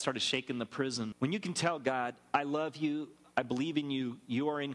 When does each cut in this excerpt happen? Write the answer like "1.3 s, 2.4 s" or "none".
1.1 s